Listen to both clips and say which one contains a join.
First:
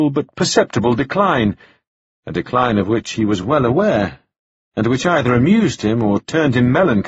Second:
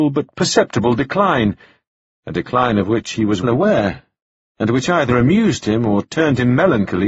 second; 1 cut; at 3.4 s

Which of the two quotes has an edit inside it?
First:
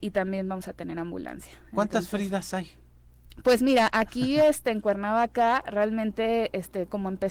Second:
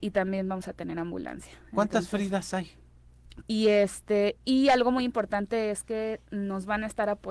second; 1 cut; at 3.4 s

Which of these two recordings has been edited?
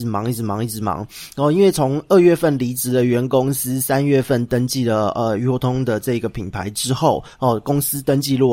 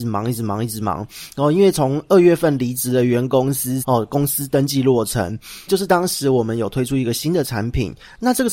second; 2 cuts; at 3.8 s, 5.7 s

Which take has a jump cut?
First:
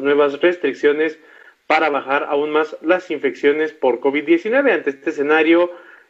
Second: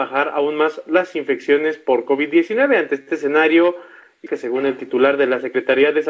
second; 1 cut; at 4.3 s

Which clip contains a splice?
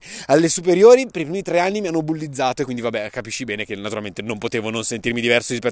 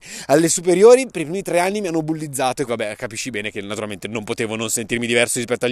second; 1 cut; at 2.7 s

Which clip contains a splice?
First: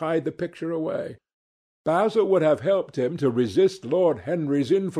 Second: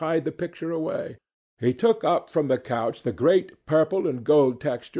second; 1 cut; at 1.5 s

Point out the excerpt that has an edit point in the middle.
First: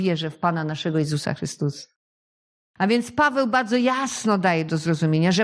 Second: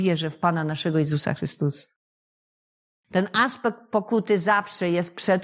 first; 1 cut; at 2.7 s

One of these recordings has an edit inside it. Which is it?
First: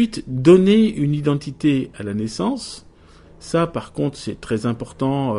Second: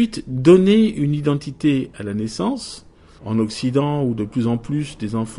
second; 1 cut; at 3.2 s

